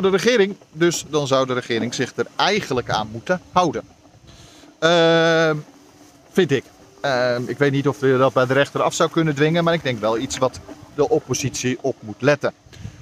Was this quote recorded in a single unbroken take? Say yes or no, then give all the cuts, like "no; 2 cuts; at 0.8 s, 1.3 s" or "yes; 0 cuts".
yes; 0 cuts